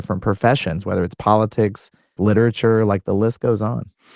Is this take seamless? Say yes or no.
no